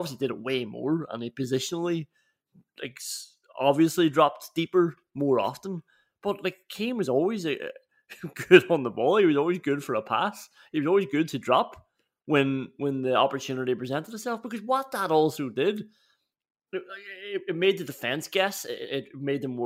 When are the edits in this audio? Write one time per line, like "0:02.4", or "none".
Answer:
none